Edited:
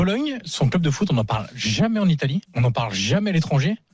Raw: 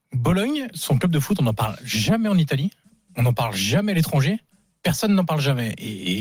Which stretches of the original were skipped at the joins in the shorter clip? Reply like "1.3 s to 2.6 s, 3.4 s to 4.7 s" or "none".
2.7 s to 3.1 s